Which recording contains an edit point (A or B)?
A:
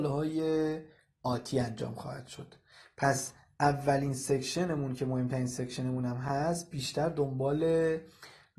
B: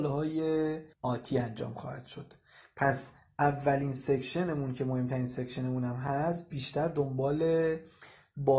B